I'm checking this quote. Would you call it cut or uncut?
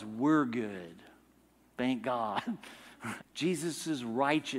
cut